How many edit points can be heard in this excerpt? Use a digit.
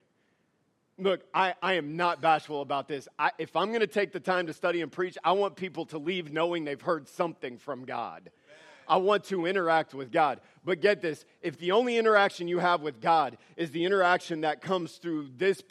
0